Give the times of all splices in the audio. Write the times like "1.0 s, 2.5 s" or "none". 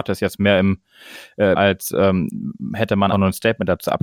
1.6 s, 3.1 s